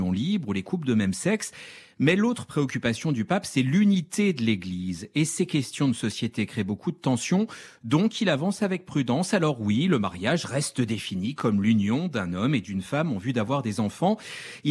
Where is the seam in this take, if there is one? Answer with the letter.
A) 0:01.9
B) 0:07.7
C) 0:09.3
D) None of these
D